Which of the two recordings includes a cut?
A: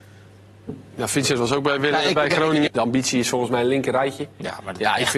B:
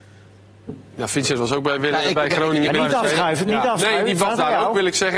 A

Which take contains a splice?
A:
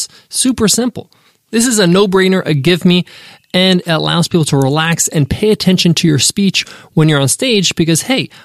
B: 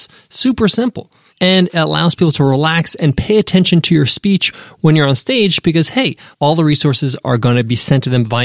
B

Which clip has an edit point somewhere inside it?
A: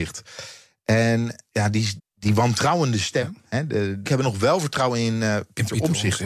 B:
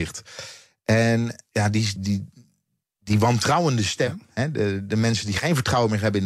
A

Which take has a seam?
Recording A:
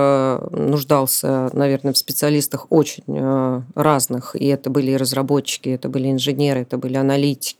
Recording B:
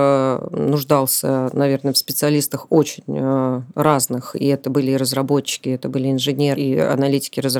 B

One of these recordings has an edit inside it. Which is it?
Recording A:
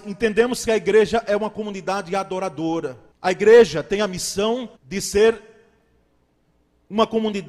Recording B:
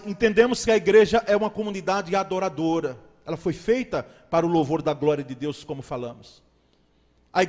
A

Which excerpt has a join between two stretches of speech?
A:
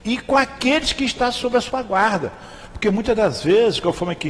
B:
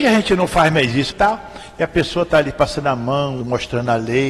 B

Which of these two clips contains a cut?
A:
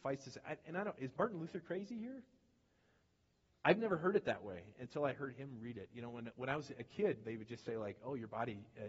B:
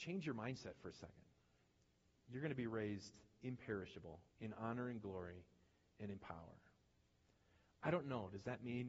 B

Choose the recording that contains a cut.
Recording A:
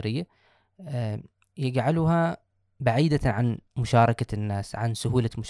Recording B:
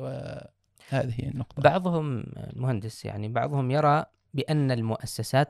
A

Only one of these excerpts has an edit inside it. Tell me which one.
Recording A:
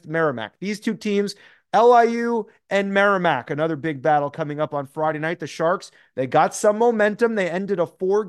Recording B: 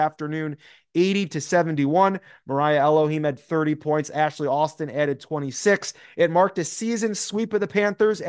A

